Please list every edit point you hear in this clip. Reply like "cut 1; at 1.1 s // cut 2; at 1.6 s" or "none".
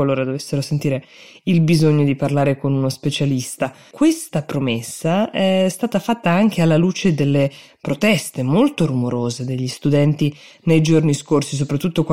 cut 1; at 3.9 s

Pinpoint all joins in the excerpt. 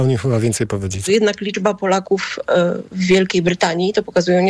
cut 1; at 1.1 s

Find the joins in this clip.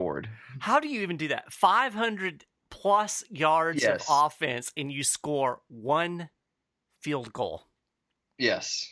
none

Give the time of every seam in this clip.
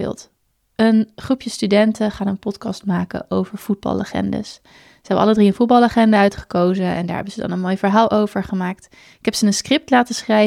none

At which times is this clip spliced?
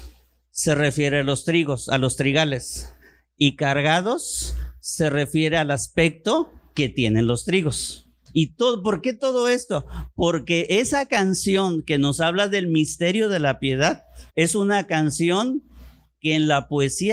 cut 1; at 8.3 s // cut 2; at 14.3 s

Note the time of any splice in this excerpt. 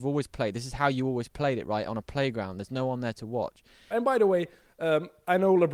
cut 1; at 3.9 s

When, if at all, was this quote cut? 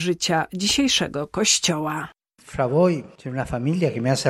none

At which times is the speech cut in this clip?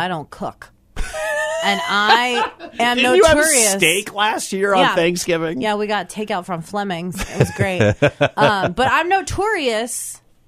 none

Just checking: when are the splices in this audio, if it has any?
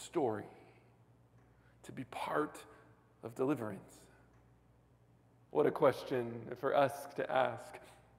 cut 1; at 5.5 s

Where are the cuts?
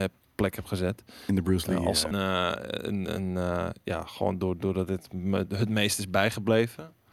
cut 1; at 2.1 s

